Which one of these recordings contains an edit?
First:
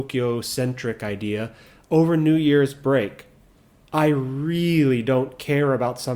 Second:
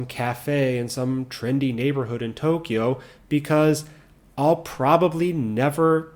first; 1 cut; at 3.9 s

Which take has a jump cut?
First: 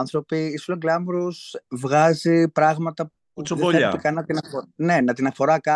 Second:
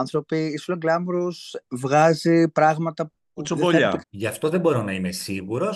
second; 1 cut; at 4.0 s

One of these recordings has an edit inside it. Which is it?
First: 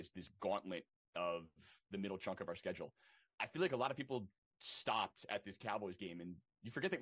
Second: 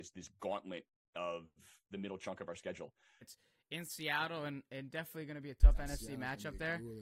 second; 1 cut; at 3.2 s

